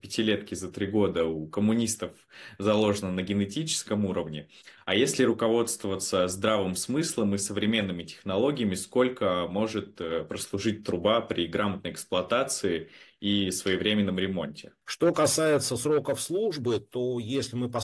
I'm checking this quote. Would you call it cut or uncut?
uncut